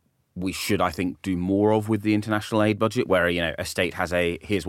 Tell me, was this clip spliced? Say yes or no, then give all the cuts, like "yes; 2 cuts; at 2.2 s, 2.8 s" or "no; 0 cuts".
no; 0 cuts